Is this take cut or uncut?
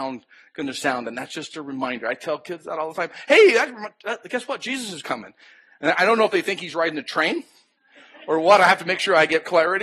uncut